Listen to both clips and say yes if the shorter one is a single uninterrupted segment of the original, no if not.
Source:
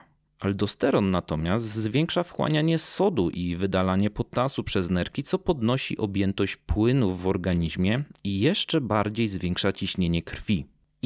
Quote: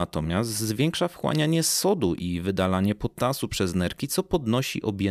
yes